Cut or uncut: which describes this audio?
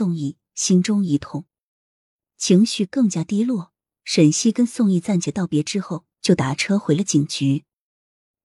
uncut